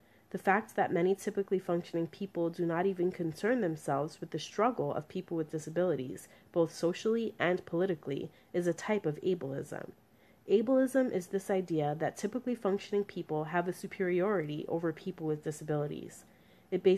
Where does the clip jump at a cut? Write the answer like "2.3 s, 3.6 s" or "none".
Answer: none